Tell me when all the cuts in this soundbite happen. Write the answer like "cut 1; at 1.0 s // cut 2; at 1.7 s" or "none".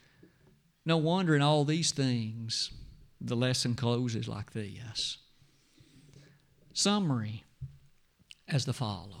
none